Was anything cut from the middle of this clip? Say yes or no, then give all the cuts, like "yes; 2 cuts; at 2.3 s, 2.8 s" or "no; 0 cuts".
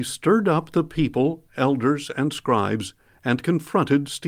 no; 0 cuts